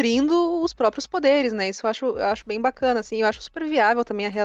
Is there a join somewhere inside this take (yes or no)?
no